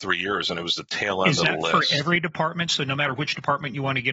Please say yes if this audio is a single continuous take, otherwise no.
yes